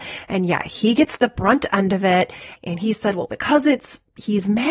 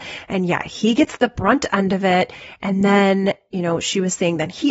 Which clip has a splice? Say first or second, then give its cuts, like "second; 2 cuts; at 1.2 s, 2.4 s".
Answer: first; 1 cut; at 2.6 s